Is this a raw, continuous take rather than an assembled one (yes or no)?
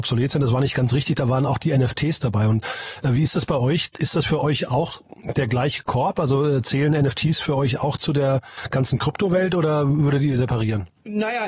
yes